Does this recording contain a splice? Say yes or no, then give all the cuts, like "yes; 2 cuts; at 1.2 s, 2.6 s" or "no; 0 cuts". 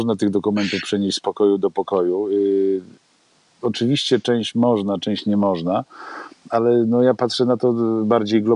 no; 0 cuts